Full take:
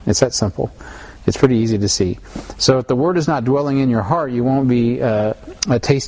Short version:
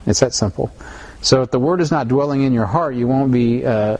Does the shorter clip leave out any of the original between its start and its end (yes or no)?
yes